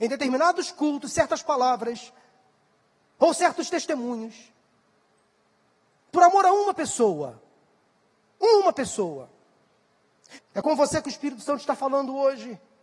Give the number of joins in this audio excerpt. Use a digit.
2